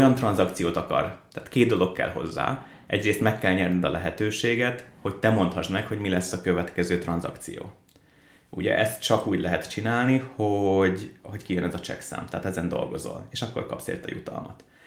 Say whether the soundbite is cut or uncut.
uncut